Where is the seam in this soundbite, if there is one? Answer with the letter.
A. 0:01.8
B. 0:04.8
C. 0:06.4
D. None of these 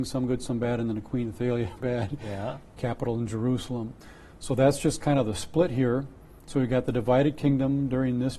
A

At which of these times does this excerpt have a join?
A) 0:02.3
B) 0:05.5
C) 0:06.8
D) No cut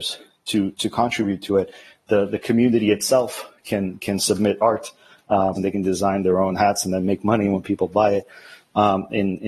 B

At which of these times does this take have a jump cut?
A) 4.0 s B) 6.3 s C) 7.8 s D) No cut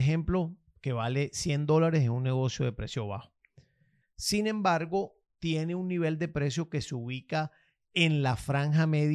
A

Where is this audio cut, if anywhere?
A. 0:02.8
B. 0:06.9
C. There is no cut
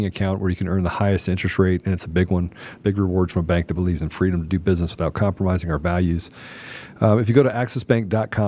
A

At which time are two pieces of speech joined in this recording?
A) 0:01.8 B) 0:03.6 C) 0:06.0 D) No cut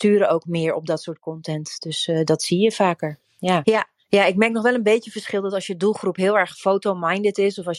B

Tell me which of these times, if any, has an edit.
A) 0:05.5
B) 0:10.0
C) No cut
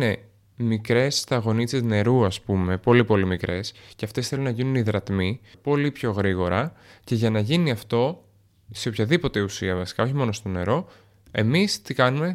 A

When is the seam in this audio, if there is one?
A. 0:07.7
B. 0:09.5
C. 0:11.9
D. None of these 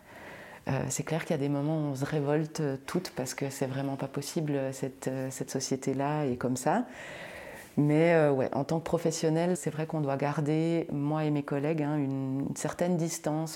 B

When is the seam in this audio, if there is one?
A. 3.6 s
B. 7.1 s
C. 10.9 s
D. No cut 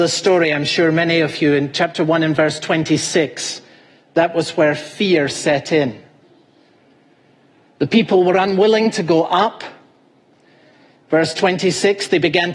D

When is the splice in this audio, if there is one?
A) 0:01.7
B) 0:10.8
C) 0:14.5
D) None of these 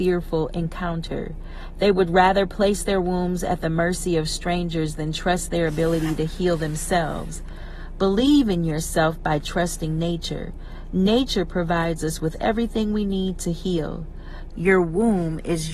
C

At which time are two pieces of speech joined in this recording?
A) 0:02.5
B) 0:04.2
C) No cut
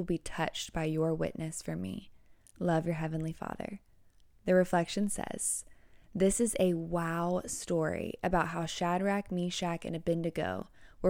C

